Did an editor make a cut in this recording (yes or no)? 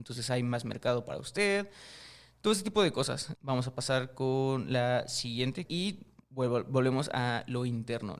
yes